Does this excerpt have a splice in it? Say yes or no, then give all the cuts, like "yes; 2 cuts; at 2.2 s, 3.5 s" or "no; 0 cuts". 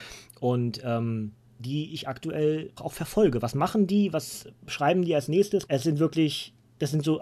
yes; 3 cuts; at 1.6 s, 2.8 s, 5.7 s